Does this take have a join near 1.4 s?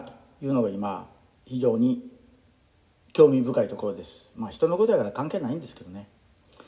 yes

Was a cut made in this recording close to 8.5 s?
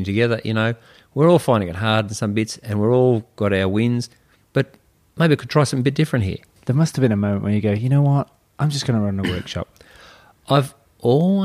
no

